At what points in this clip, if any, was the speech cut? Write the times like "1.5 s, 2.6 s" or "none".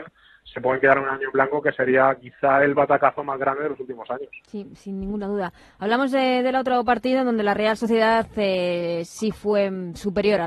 none